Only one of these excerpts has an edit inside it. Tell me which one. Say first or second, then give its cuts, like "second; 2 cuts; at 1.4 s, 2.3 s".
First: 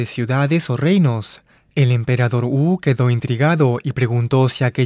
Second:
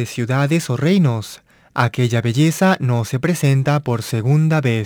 first; 1 cut; at 1.6 s